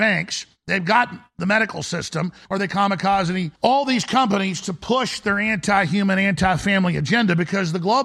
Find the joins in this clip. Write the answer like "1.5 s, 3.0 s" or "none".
2.5 s, 3.6 s